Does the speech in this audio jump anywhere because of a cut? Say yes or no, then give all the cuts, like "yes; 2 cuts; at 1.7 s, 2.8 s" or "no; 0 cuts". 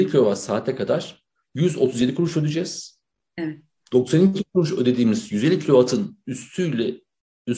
no; 0 cuts